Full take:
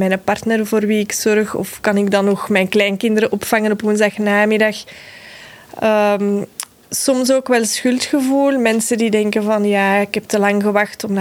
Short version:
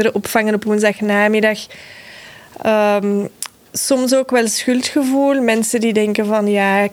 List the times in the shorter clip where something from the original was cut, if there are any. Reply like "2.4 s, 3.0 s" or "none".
none